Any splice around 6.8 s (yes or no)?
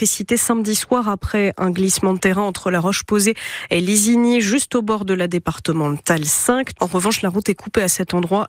yes